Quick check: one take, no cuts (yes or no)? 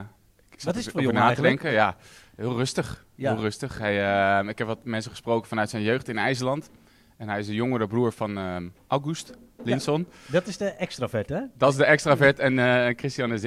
yes